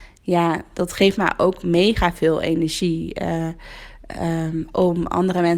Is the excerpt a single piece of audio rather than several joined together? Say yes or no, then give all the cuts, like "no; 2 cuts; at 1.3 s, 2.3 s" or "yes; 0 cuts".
yes; 0 cuts